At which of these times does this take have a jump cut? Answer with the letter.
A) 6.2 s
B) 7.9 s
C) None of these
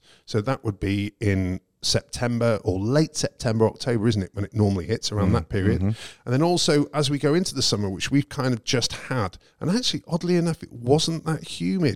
C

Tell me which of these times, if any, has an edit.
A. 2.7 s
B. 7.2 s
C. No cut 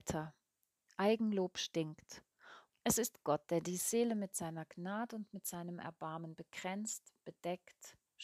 A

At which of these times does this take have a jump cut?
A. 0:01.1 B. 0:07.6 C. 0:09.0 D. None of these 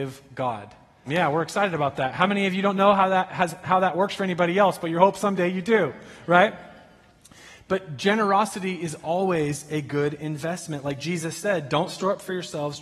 A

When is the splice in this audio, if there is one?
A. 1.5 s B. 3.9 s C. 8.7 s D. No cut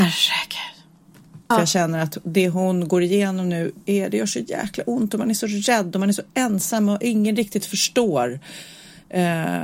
A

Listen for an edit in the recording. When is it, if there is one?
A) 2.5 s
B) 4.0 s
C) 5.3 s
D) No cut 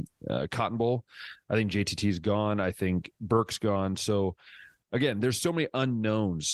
D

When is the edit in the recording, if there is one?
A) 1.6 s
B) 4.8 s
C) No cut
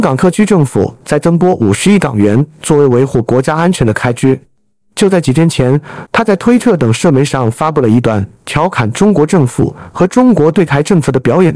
B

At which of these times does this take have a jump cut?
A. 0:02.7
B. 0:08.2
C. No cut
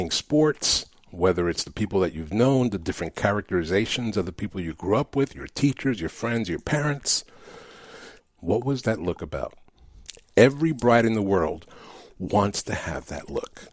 B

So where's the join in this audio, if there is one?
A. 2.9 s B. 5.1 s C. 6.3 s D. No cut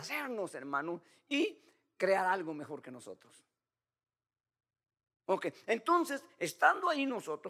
D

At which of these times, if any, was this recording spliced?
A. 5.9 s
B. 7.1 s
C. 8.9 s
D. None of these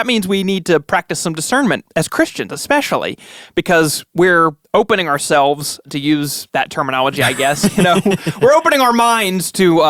D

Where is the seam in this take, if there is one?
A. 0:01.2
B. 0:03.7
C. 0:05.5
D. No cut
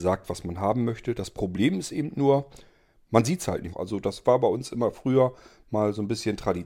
B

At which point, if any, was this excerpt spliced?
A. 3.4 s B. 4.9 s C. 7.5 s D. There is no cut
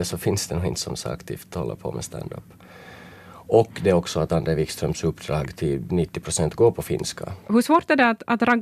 C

